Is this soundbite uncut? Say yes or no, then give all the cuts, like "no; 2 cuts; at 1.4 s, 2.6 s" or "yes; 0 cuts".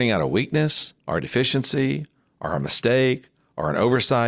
no; 2 cuts; at 1.0 s, 2.3 s